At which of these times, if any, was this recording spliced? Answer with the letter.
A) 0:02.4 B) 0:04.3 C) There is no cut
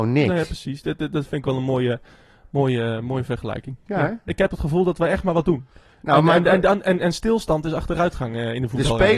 B